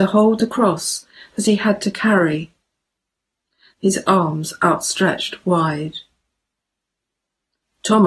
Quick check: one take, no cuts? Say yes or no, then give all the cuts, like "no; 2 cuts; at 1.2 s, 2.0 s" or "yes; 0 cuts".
no; 1 cut; at 3.7 s